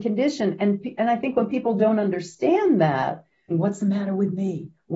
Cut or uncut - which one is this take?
cut